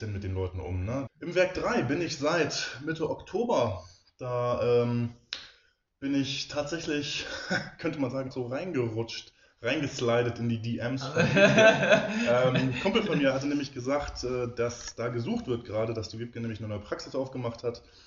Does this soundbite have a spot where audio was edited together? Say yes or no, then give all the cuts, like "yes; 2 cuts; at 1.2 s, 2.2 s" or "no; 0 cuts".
yes; 2 cuts; at 1.1 s, 8.3 s